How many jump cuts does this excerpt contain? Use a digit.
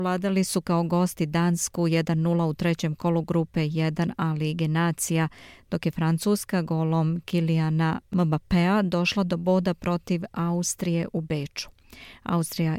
0